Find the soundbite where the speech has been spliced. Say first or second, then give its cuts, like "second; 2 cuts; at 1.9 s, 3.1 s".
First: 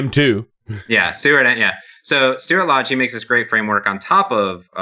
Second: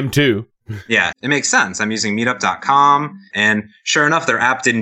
second; 2 cuts; at 1.1 s, 3.3 s